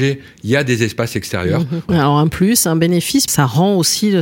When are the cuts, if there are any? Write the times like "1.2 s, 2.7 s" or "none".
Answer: 1.9 s, 3.3 s